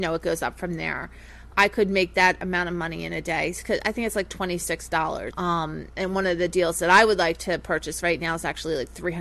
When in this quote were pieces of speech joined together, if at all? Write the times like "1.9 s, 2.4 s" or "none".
1.5 s, 5.3 s